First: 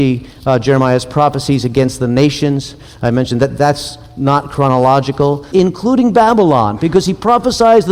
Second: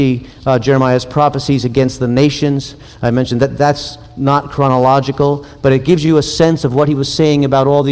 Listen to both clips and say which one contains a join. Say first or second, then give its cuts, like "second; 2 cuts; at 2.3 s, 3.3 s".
first; 1 cut; at 5.5 s